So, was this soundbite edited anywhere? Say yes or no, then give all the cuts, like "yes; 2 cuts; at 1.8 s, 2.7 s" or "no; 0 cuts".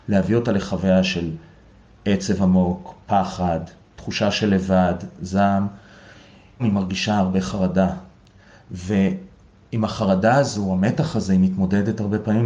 yes; 1 cut; at 6.6 s